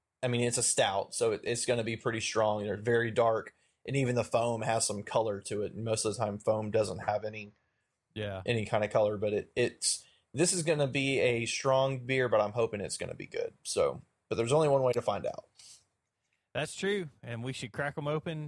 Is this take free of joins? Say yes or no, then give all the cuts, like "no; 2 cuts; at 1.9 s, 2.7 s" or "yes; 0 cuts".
yes; 0 cuts